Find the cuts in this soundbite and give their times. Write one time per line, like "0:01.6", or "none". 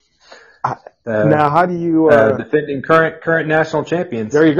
none